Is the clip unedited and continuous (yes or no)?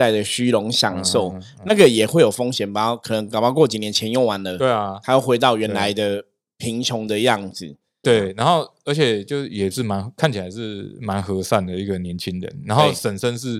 no